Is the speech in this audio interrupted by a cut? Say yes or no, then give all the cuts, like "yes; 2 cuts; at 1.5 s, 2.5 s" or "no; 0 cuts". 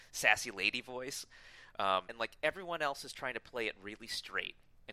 yes; 1 cut; at 2.1 s